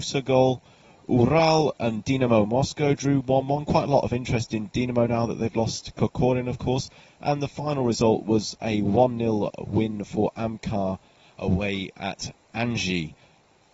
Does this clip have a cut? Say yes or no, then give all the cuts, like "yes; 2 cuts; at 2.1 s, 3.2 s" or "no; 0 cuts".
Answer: no; 0 cuts